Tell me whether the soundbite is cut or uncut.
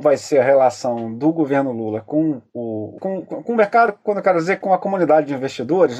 cut